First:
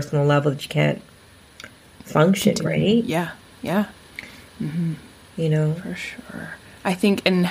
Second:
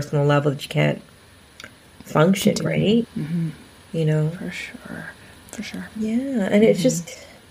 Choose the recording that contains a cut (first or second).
second